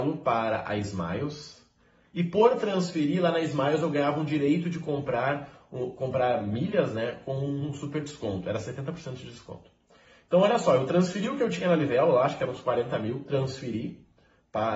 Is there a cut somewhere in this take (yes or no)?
no